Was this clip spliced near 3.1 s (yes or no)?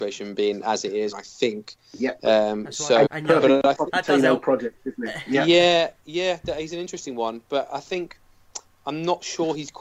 yes